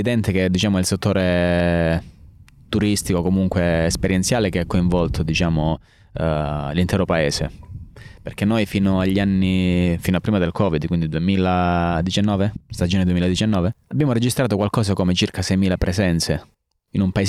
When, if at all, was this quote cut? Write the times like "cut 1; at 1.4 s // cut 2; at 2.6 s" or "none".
none